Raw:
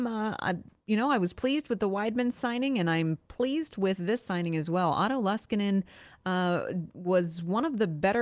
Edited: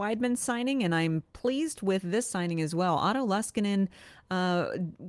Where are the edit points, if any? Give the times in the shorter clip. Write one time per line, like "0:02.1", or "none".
none